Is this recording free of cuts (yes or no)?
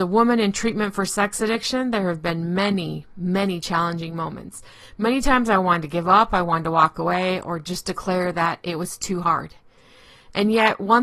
yes